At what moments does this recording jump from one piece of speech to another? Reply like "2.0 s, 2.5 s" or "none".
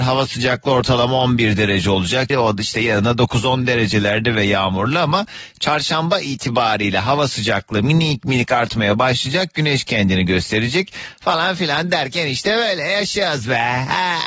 2.3 s

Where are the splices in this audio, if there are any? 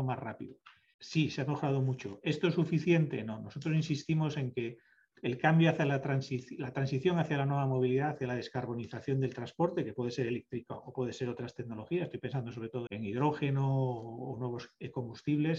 0.9 s, 12.9 s

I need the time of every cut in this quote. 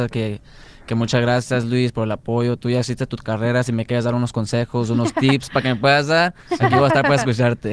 none

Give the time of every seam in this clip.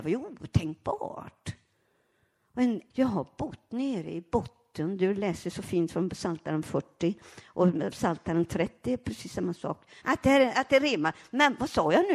2.9 s, 10.0 s

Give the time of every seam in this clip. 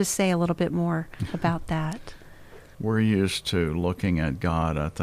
2.7 s

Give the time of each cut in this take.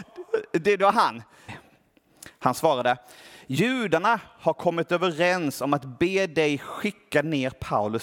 1.5 s

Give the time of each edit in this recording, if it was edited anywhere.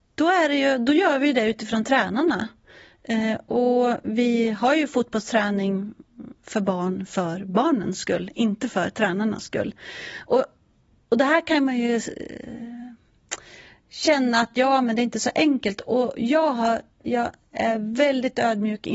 17.0 s

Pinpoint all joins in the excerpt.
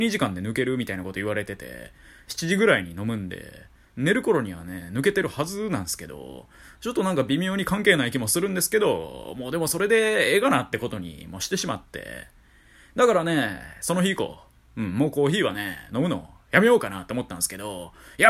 2.3 s

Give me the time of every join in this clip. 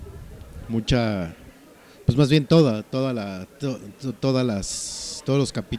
none

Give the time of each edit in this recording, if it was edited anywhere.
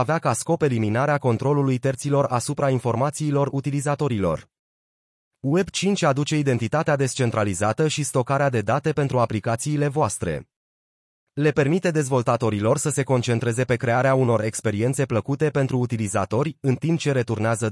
none

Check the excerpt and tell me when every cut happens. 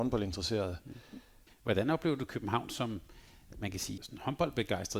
1.5 s, 4.0 s

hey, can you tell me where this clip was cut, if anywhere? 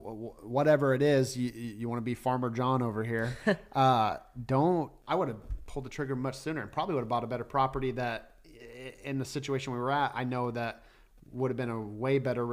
5.0 s

